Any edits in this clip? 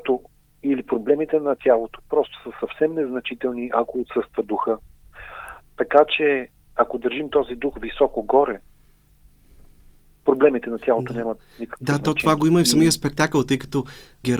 no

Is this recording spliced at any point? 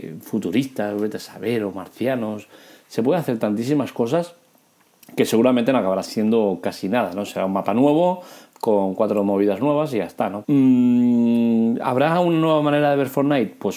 yes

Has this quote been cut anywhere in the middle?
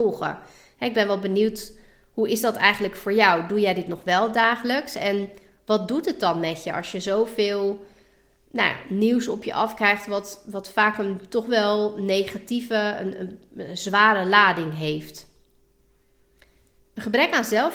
no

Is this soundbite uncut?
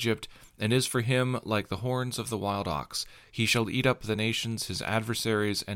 yes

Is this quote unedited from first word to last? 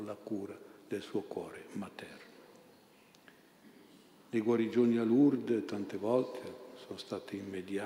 yes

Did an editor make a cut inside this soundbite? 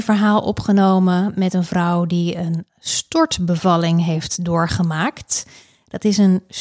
no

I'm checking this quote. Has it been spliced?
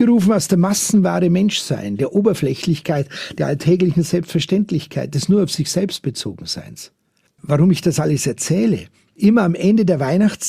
no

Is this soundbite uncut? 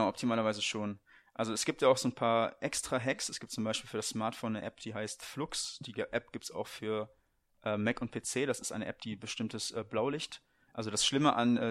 yes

